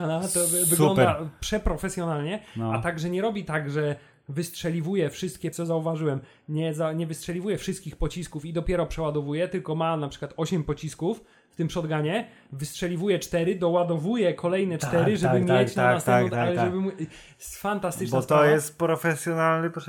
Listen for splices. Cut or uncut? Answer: cut